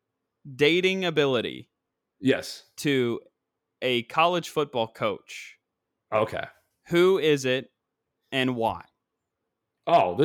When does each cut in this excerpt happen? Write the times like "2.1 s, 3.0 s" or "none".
none

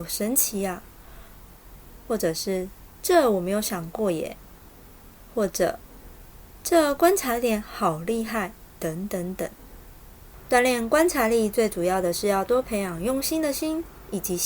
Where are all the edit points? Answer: none

